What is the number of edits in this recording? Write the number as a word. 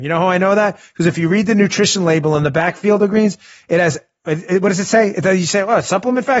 zero